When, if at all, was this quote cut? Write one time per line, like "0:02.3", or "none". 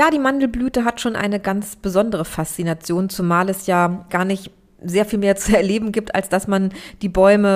0:04.1